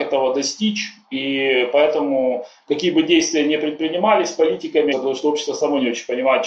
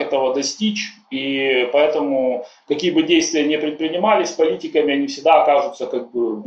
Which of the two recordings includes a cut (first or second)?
first